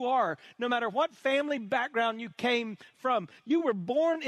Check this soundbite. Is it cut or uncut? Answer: uncut